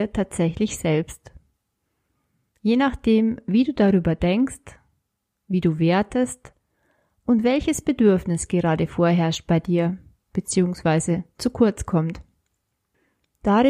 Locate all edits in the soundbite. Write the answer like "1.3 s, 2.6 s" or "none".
none